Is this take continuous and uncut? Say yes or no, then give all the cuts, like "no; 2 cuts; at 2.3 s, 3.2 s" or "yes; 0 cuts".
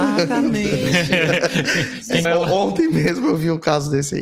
no; 1 cut; at 2.2 s